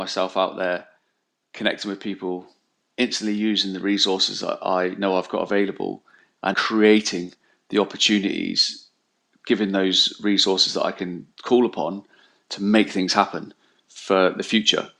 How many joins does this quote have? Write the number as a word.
one